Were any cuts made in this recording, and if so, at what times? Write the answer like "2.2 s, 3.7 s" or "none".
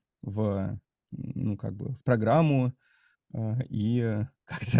none